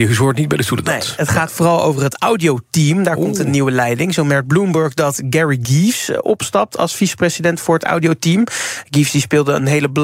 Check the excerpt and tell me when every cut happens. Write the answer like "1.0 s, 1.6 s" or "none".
none